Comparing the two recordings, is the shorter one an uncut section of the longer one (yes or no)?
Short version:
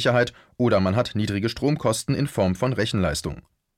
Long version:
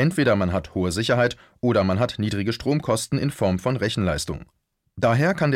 yes